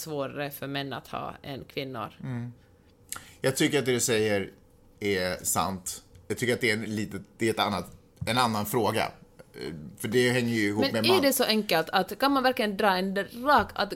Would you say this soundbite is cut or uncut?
uncut